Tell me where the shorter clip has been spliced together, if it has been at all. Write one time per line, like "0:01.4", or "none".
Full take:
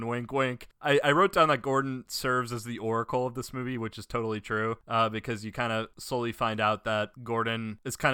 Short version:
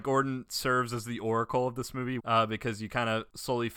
0:02.2